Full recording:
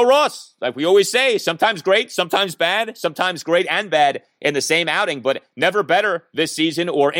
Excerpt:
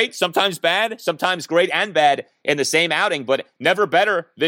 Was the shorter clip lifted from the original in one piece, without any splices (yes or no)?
yes